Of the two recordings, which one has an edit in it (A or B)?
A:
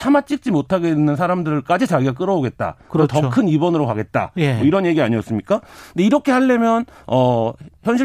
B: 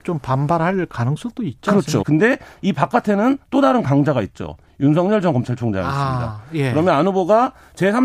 B